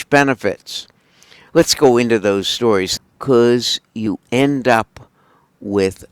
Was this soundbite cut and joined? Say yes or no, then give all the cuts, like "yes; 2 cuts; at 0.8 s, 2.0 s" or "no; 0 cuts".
yes; 2 cuts; at 1.5 s, 3.0 s